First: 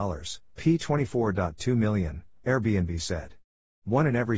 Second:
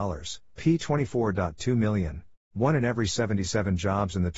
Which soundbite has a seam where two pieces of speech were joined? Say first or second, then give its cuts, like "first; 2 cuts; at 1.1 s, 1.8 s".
second; 1 cut; at 2.3 s